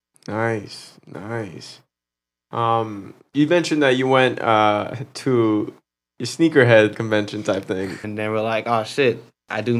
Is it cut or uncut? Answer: cut